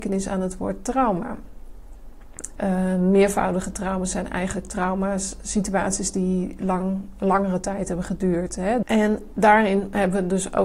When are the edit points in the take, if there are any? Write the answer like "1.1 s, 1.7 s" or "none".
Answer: 2.6 s, 8.8 s